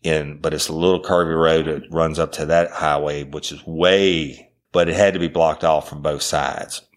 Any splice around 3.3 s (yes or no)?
no